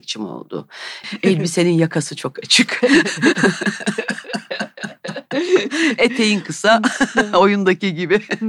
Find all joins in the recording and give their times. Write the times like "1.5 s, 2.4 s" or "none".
1.0 s